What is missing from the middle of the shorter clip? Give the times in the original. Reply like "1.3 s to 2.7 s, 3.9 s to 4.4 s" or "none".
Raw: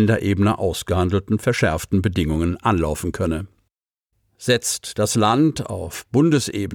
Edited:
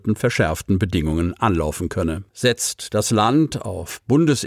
3.5 s to 4.3 s